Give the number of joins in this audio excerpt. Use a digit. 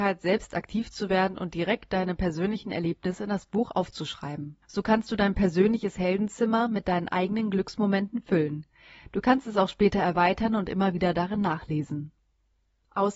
1